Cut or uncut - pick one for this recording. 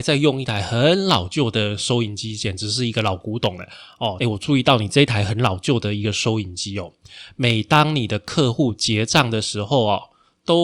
cut